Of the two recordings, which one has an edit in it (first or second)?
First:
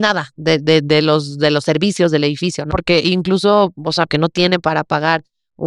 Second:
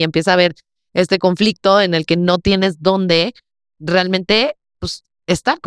first